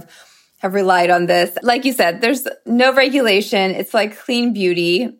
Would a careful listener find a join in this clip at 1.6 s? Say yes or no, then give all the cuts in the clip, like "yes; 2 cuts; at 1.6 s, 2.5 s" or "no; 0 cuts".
no; 0 cuts